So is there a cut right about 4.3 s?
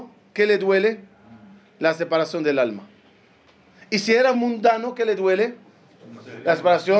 yes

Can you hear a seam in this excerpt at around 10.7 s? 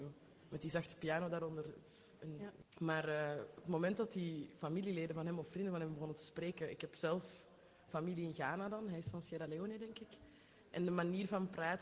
no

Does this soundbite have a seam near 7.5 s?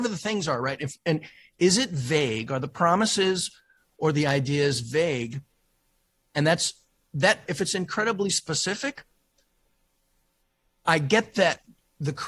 yes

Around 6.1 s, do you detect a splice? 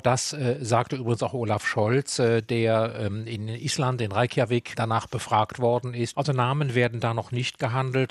yes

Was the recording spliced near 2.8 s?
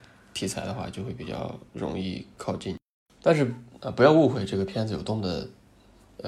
no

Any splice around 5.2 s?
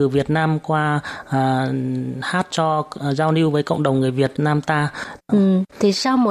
yes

